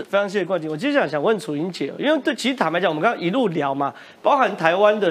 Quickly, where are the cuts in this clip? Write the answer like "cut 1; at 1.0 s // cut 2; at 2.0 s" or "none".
none